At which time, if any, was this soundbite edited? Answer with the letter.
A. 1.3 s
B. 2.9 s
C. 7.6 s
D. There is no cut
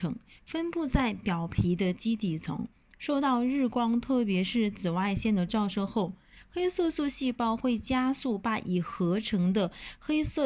D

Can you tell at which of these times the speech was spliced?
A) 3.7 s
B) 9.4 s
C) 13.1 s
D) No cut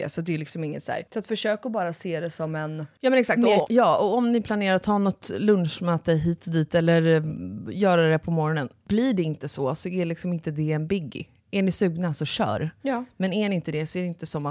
A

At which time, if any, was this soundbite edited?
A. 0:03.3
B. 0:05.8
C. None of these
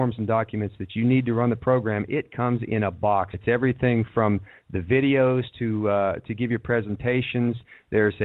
A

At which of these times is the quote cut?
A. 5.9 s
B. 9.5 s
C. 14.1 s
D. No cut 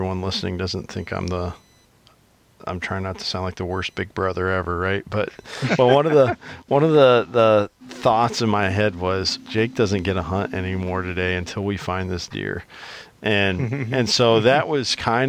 B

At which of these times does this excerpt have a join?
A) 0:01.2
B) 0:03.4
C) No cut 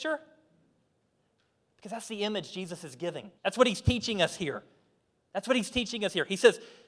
B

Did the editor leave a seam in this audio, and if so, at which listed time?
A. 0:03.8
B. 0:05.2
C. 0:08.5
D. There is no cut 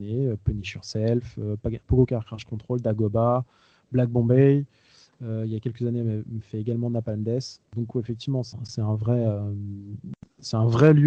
C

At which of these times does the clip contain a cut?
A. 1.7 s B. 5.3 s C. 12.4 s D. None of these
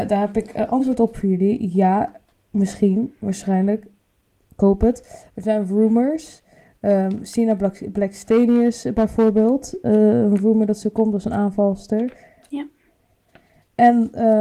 D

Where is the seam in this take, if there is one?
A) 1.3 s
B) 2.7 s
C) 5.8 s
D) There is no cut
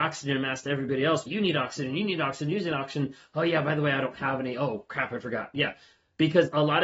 A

